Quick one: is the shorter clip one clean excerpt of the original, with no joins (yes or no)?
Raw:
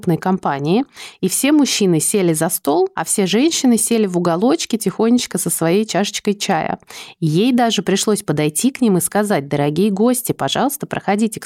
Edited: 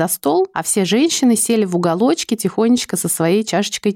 yes